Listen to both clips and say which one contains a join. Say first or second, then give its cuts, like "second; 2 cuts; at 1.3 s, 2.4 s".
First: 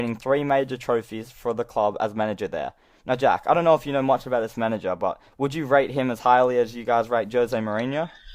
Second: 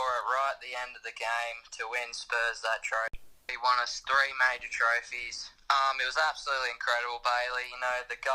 second; 2 cuts; at 3.5 s, 5.6 s